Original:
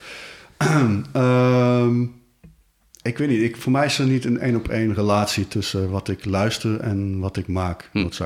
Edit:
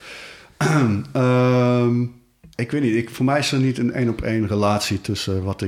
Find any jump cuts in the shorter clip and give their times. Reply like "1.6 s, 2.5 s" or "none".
2.5 s